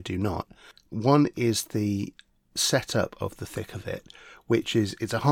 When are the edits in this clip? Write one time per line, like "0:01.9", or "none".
0:00.9